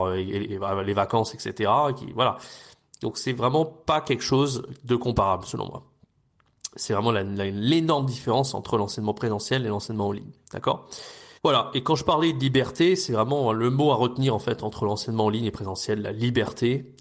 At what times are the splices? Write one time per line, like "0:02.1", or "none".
0:11.4

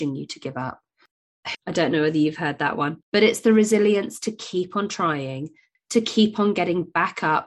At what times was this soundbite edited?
0:01.5
0:03.0
0:05.7

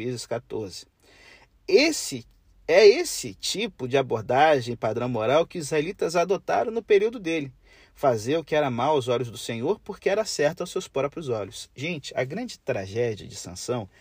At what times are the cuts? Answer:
none

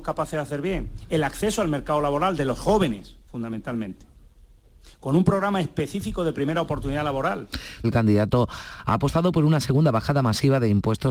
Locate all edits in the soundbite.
0:07.8

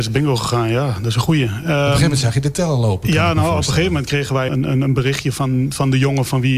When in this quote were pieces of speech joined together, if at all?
0:04.5

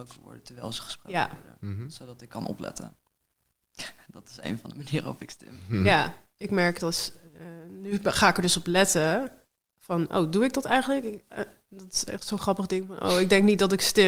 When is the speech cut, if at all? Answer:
0:03.0

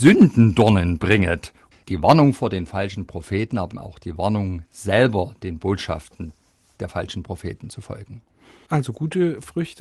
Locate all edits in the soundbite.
0:01.7
0:03.7

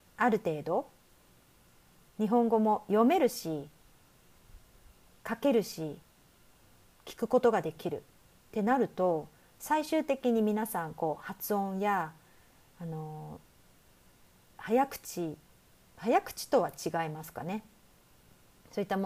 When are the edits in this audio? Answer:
none

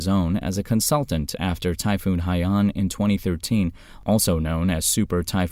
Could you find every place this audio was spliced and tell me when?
none

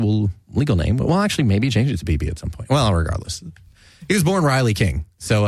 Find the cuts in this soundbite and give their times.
none

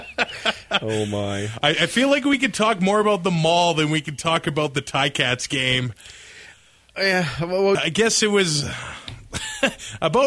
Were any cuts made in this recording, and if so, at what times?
0:07.7

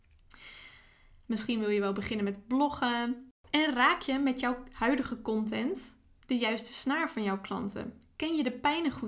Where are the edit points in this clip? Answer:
0:01.2

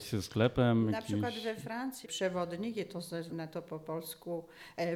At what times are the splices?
0:02.0
0:03.3

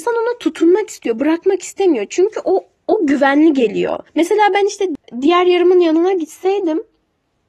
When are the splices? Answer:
none

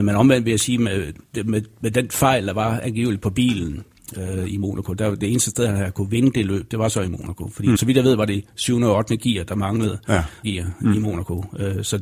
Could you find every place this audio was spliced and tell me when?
0:07.8
0:10.4

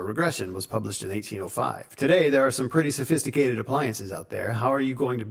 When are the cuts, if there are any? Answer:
0:02.0

